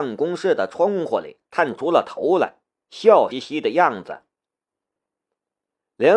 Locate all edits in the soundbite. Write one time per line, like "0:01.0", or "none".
0:03.3